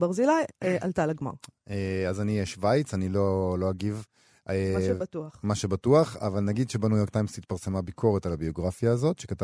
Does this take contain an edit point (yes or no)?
no